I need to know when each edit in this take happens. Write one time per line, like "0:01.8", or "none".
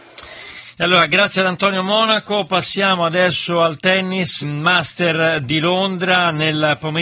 0:04.4